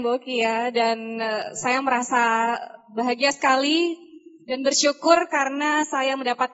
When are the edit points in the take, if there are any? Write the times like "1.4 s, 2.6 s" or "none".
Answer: none